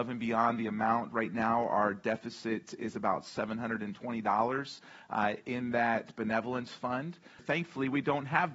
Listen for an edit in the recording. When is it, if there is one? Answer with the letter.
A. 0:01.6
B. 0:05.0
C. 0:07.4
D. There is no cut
C